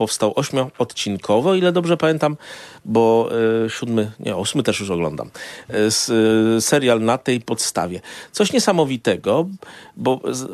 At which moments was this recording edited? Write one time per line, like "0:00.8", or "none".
none